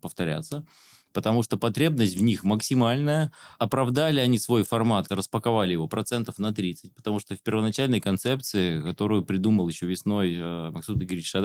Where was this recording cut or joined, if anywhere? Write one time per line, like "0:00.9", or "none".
0:05.1